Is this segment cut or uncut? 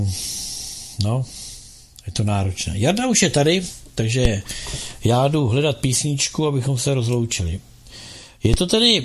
uncut